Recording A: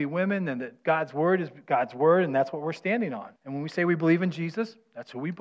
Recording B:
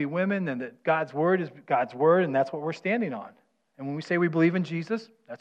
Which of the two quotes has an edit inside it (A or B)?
A